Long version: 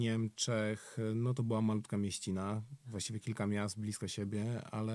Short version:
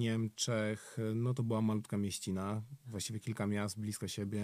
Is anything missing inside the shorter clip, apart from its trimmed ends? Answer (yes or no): no